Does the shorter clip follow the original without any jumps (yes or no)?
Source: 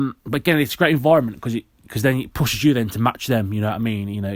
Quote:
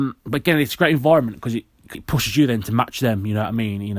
no